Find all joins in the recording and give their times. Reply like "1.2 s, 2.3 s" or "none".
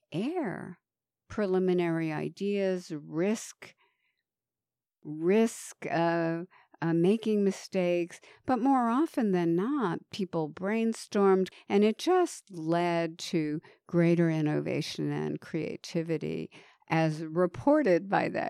11.5 s